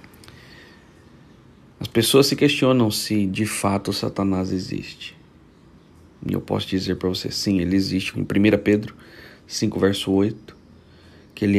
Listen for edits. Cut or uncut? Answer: cut